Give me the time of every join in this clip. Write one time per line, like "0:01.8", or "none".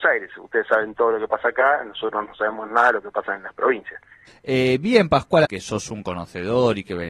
0:04.3
0:05.5